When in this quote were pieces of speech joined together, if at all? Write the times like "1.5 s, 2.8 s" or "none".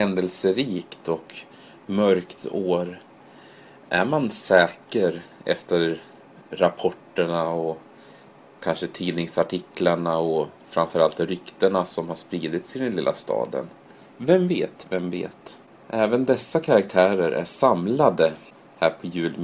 14.0 s